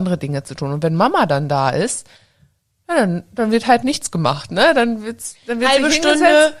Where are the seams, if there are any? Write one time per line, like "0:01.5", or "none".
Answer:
0:03.8

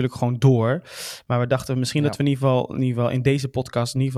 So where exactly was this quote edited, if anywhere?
none

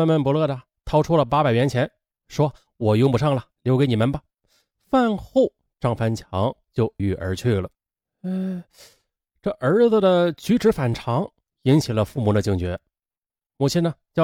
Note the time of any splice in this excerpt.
0:07.0

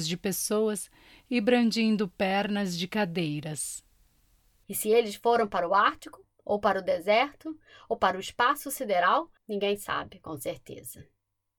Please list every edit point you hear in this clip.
0:09.4

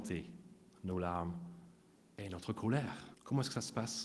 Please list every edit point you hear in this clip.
0:03.1

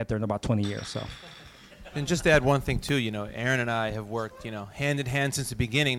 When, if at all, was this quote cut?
0:01.9

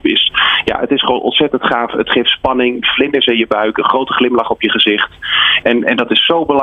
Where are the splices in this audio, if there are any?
0:02.8
0:05.6

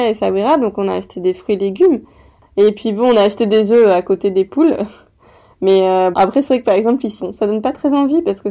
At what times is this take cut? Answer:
0:06.1
0:07.2

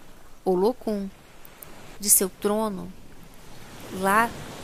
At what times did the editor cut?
0:02.0

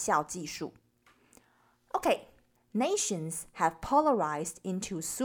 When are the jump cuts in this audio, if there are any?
0:02.5

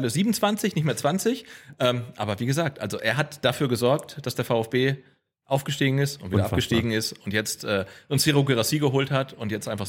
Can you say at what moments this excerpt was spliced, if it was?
none

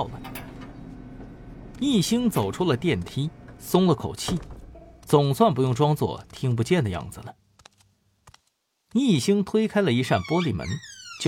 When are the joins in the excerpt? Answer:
none

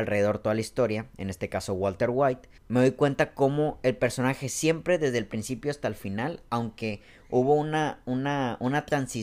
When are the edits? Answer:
0:02.6

